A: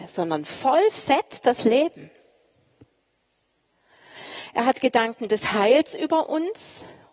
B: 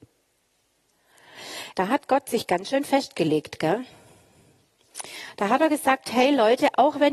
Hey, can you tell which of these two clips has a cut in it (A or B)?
B